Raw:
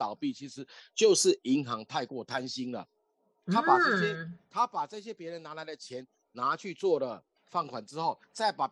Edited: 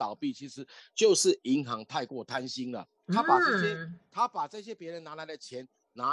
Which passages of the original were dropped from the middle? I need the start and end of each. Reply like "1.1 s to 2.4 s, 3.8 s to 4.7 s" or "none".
3.0 s to 3.4 s